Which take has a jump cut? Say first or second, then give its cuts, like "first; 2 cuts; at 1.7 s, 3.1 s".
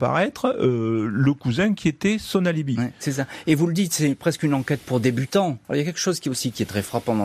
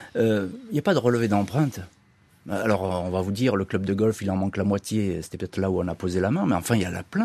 first; 1 cut; at 5.6 s